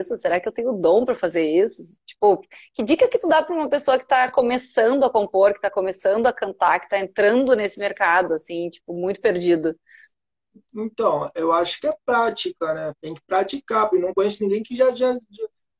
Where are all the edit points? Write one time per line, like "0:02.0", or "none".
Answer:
0:12.9
0:13.9